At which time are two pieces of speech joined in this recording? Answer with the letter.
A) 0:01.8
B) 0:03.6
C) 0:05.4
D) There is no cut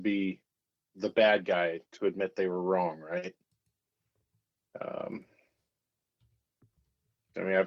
D